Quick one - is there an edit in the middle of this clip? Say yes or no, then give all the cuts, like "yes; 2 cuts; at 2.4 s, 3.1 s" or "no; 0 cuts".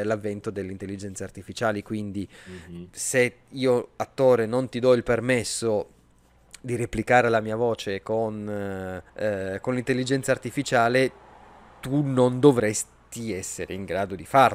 yes; 1 cut; at 9.1 s